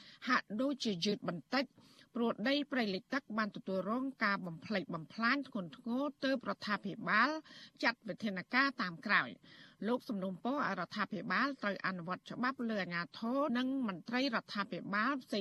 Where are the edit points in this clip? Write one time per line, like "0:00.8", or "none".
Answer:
0:13.5